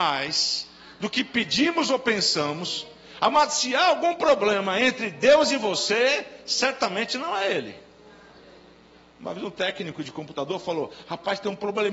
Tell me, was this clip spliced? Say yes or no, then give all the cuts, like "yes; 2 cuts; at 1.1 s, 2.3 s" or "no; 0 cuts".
no; 0 cuts